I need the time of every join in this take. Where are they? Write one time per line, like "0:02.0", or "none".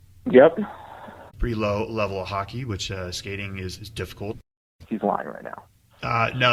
0:01.3
0:04.8